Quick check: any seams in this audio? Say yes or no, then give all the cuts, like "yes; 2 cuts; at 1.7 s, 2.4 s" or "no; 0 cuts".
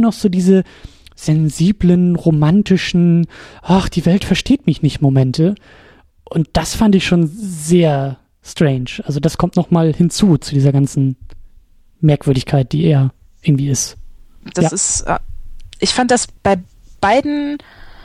yes; 2 cuts; at 14.5 s, 16.4 s